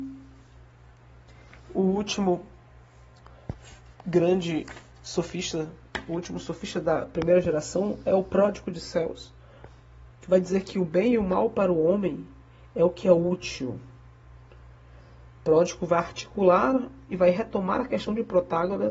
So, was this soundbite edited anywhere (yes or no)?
no